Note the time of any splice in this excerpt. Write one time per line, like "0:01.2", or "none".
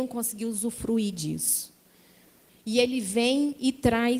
0:02.5